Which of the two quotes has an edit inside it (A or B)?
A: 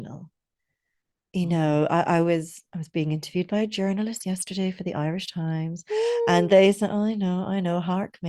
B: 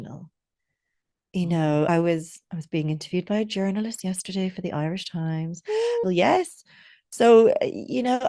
B